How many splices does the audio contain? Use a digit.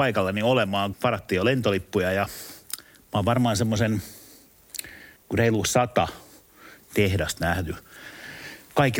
2